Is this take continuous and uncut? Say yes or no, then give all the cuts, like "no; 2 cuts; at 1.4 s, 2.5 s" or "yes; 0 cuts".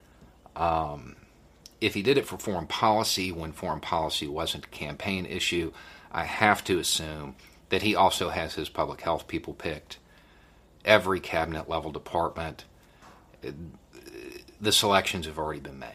yes; 0 cuts